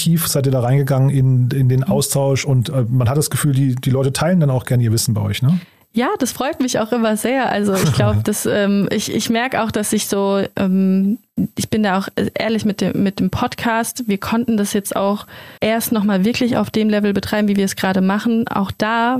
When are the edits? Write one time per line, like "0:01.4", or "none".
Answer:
0:15.6